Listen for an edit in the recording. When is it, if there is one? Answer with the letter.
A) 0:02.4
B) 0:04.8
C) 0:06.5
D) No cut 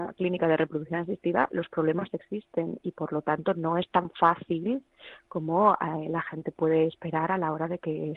D